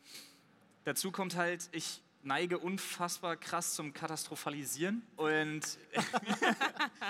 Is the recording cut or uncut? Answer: cut